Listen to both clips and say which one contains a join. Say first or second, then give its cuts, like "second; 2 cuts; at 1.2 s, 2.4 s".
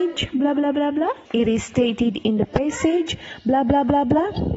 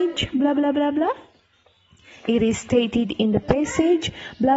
first; 1 cut; at 1.3 s